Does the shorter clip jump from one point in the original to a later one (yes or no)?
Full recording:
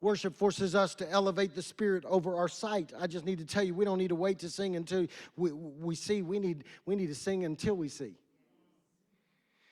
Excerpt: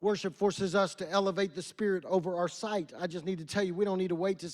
no